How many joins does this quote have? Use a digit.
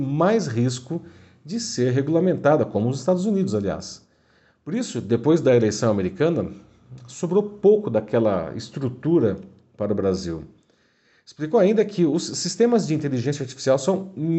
0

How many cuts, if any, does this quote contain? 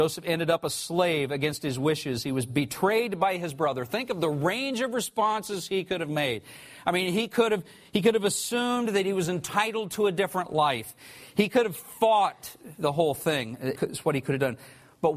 1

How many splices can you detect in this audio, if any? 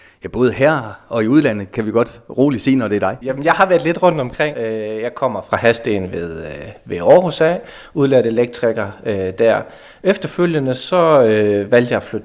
2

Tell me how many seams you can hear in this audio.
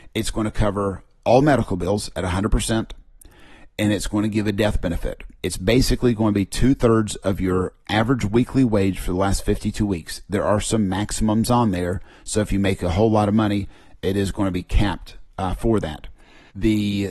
2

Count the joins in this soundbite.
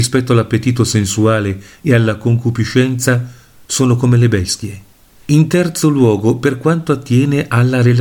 1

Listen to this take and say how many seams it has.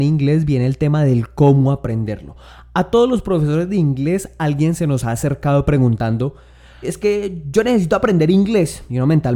1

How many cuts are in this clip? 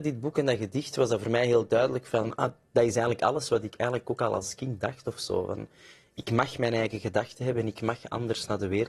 1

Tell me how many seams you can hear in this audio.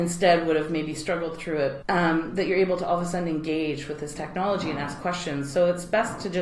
1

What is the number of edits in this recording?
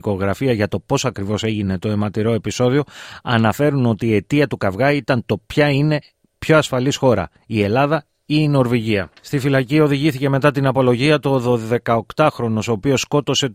1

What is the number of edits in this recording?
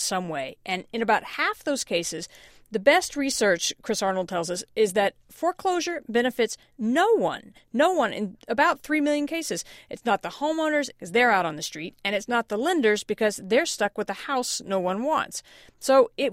1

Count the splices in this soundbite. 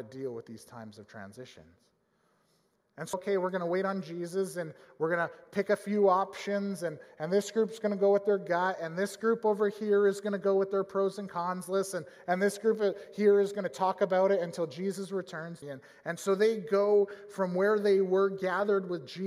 2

